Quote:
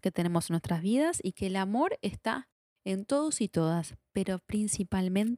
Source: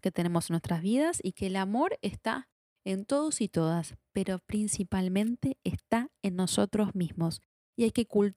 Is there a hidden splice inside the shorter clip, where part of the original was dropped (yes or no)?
no